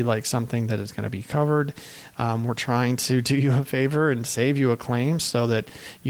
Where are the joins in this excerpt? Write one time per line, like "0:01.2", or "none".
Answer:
none